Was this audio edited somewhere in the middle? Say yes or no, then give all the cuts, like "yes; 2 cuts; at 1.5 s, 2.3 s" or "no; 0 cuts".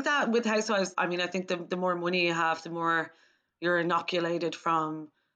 yes; 1 cut; at 0.9 s